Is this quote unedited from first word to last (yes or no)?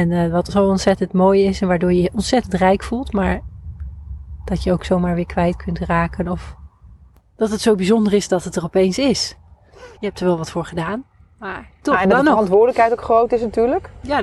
no